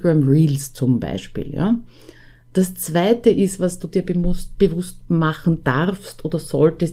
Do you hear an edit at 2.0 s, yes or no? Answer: no